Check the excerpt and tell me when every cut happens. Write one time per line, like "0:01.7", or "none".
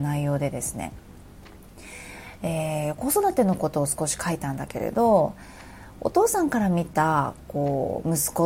none